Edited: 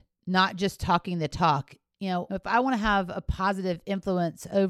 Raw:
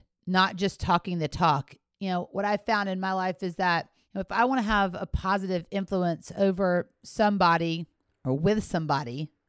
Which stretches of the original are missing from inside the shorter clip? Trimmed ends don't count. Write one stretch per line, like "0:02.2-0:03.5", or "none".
0:02.3-0:04.1